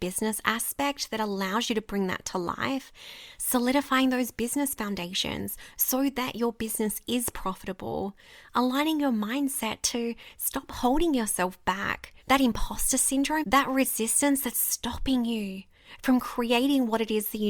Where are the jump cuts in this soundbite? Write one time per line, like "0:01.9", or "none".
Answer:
0:12.2
0:13.4